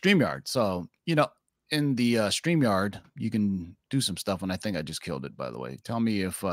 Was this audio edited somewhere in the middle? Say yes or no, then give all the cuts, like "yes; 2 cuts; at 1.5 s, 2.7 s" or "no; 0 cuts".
no; 0 cuts